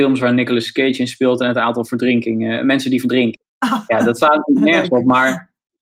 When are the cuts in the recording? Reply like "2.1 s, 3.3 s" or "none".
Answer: none